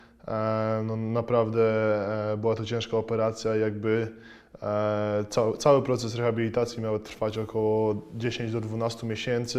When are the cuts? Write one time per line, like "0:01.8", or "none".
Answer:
none